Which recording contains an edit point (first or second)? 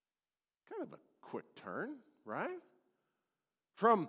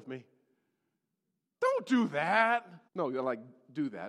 second